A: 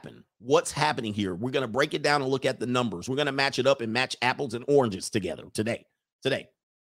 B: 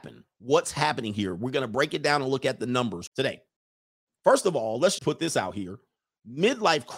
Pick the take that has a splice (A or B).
B